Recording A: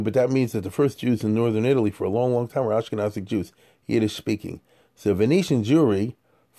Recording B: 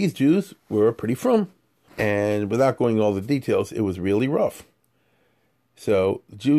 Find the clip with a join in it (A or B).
B